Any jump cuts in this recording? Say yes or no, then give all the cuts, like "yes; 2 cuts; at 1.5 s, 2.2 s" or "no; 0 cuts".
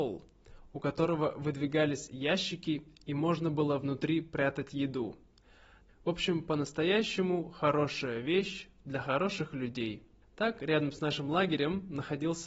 yes; 2 cuts; at 5.9 s, 10.2 s